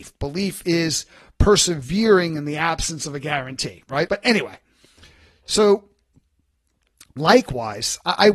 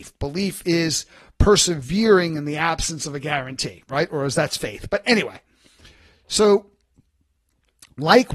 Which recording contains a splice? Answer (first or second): first